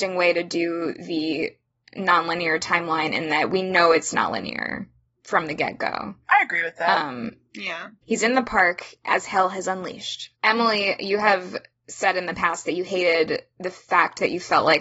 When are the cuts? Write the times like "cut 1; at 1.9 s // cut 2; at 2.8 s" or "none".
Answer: cut 1; at 8.0 s // cut 2; at 10.3 s